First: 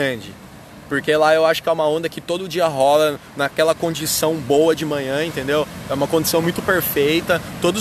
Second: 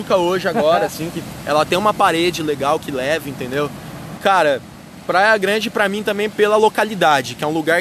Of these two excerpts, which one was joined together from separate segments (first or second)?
second